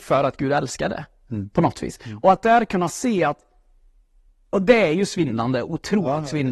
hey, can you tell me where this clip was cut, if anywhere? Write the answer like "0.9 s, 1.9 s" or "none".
none